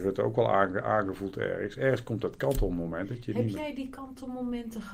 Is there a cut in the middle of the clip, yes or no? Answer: no